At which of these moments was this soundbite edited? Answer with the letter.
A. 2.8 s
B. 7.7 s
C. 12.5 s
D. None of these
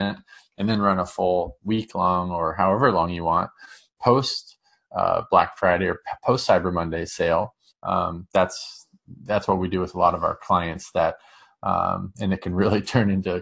B